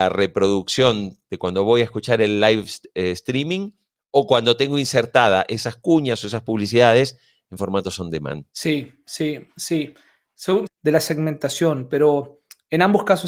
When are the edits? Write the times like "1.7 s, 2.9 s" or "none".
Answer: 8.5 s, 10.7 s